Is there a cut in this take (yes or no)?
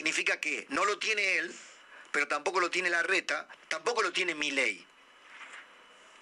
yes